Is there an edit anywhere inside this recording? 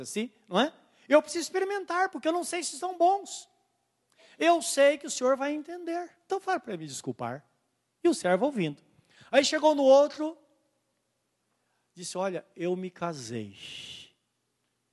no; 0 cuts

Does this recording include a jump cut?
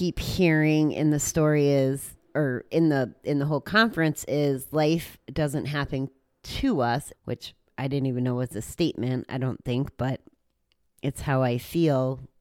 yes; 1 cut; at 7.1 s

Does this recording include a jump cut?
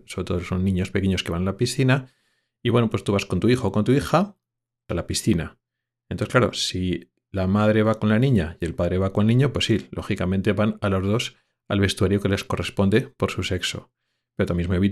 no; 0 cuts

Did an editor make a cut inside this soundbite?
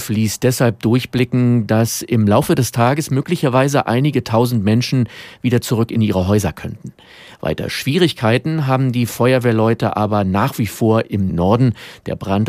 no; 0 cuts

